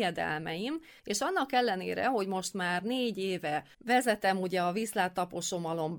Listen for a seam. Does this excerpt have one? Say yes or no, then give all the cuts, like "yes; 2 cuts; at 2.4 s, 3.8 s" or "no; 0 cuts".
yes; 1 cut; at 3.7 s